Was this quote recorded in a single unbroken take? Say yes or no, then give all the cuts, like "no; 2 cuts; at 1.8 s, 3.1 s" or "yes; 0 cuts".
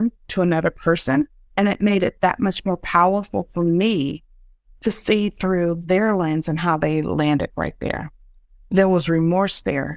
no; 2 cuts; at 1.5 s, 8.6 s